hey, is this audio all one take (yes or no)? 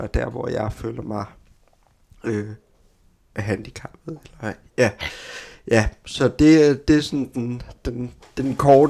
yes